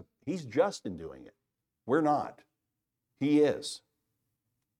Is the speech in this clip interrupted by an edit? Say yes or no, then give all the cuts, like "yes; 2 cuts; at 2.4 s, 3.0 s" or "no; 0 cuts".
no; 0 cuts